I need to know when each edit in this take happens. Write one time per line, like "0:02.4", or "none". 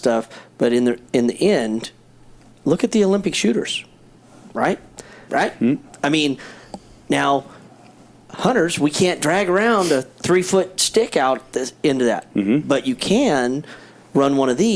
0:05.3